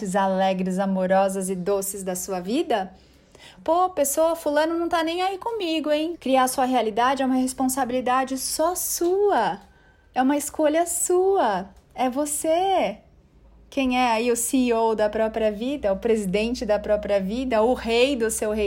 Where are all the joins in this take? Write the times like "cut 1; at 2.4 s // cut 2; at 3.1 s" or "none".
cut 1; at 3.6 s // cut 2; at 6.1 s